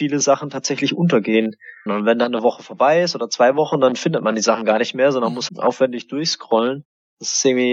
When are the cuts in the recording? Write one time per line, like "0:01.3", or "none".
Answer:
0:01.9
0:05.5